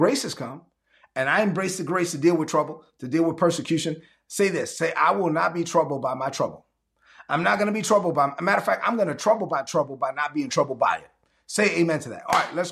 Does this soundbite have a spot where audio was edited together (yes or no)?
no